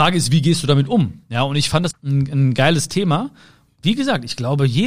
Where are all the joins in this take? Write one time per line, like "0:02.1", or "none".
0:01.9
0:03.7